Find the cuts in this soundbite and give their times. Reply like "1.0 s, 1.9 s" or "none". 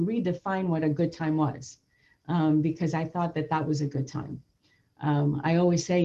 none